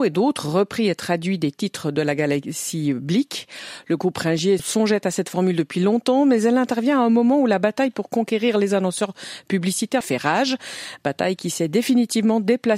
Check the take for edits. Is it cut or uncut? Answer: cut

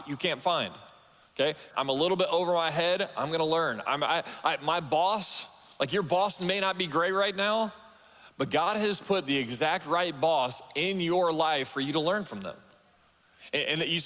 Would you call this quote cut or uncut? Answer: cut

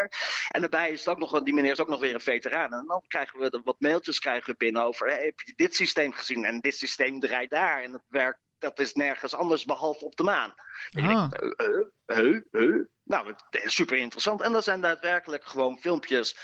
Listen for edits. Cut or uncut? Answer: uncut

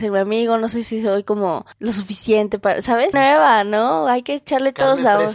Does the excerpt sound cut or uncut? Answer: cut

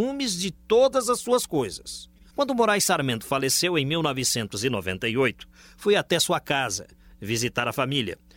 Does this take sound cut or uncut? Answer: cut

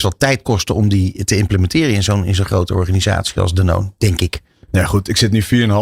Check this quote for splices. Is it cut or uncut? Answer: uncut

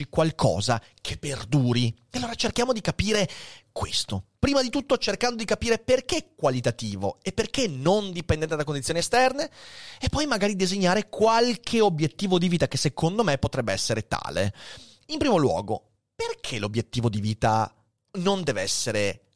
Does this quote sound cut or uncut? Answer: uncut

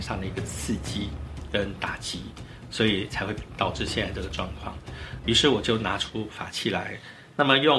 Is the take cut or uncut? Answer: cut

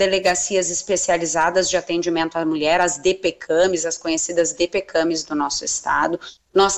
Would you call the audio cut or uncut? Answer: uncut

